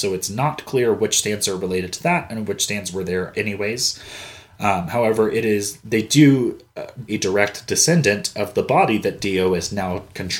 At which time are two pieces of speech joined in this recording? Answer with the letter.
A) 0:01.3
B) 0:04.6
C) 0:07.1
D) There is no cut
C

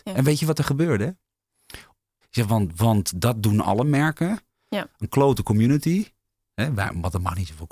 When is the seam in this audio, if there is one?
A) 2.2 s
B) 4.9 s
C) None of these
A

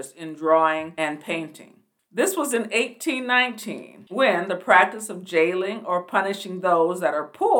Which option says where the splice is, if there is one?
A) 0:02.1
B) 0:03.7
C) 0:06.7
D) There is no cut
A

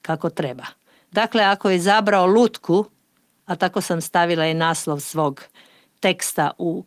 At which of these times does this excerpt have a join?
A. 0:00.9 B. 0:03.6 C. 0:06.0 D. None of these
D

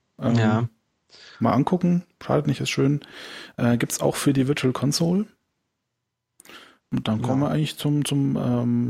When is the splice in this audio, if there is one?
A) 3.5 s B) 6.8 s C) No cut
B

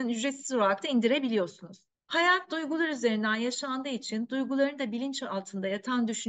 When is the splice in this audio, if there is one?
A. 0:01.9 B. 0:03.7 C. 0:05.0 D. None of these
A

